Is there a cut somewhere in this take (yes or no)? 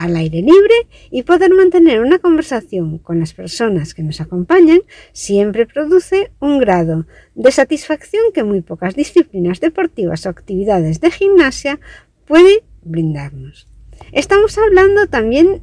yes